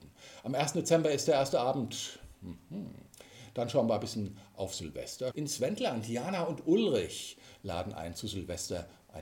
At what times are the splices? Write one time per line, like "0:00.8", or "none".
0:05.3